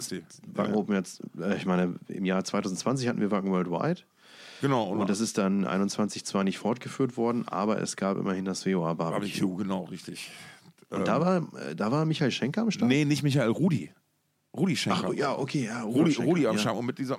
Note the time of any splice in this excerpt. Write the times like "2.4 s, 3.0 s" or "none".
none

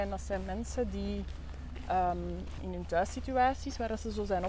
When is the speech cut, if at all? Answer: 2.6 s

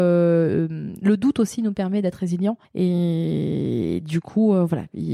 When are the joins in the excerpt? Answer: 2.6 s

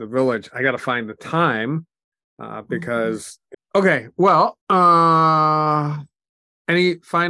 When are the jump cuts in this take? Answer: 3.5 s, 4.6 s

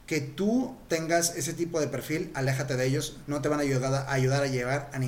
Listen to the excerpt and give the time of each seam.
3.2 s

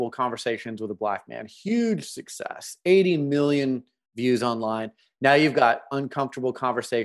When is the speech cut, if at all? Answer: none

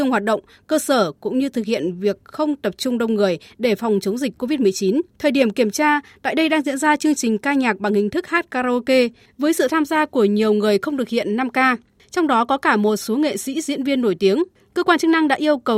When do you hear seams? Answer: 5.1 s

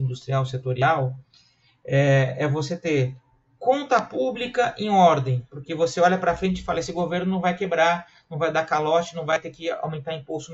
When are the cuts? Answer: none

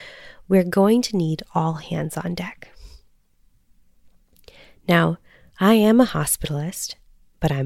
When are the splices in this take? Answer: none

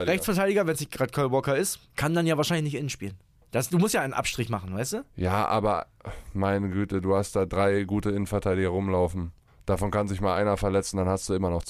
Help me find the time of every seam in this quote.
none

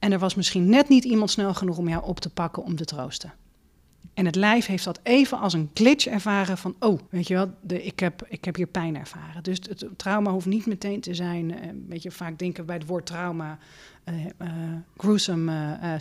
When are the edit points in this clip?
7.1 s

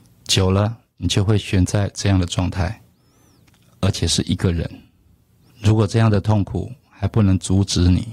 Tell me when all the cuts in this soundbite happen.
5.5 s

